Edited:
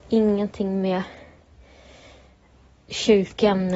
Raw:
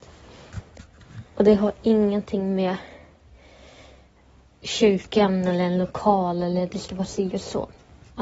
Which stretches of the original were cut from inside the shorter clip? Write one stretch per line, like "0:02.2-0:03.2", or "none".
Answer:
none